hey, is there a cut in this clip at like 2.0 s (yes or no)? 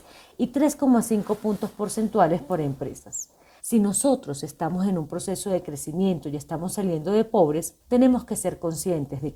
no